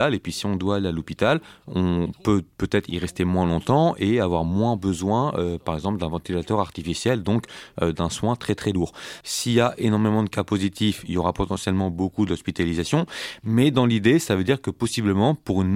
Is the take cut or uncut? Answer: cut